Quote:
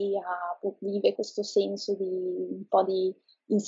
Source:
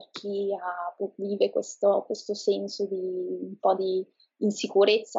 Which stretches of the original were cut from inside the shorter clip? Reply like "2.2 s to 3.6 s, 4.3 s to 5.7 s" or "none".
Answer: 1.5 s to 2.1 s

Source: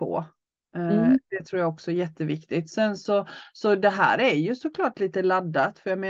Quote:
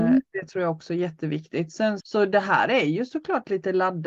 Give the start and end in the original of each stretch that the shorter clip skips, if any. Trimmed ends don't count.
3.0 s to 3.5 s

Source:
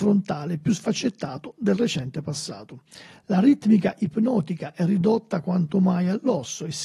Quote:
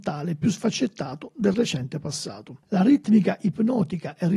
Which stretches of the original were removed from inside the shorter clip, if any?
2.9 s to 3.2 s

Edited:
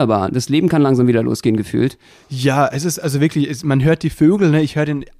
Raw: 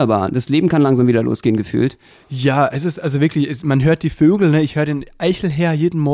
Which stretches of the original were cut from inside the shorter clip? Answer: none

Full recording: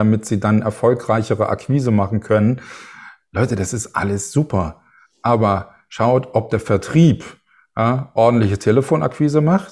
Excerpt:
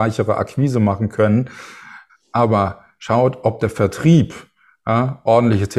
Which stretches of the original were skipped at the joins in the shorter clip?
3.2 s to 5.0 s

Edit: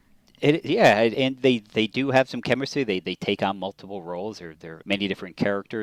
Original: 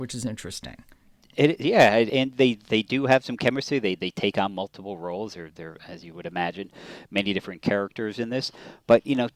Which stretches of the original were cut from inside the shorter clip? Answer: 5.8 s to 7.1 s

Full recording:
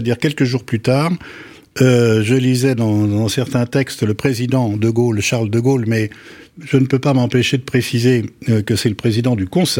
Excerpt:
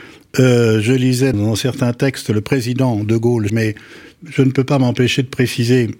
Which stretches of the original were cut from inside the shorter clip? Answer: 2.8 s to 3.1 s, 5.2 s to 5.8 s

